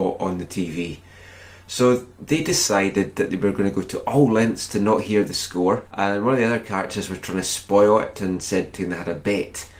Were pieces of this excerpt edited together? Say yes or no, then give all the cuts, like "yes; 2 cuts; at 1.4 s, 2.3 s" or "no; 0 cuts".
yes; 2 cuts; at 5.9 s, 8.7 s